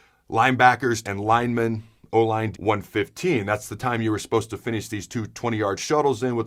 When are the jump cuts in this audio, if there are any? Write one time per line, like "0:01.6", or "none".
0:01.0
0:02.5